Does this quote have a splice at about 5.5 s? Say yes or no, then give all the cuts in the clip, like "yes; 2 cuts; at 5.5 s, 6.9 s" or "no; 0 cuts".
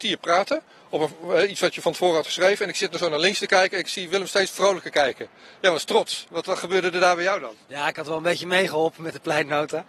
no; 1 cut; at 7.6 s